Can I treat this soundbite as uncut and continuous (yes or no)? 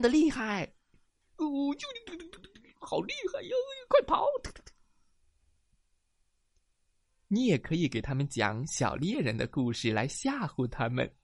yes